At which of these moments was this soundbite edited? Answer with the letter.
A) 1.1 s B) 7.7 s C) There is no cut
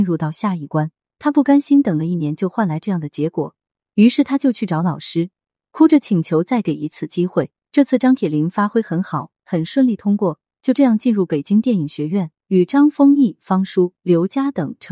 B